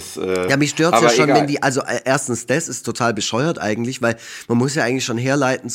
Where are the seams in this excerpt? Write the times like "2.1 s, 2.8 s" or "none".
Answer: none